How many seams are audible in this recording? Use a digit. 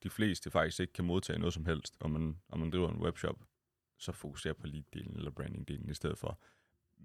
0